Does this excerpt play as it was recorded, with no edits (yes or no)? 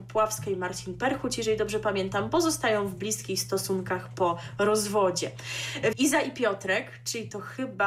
no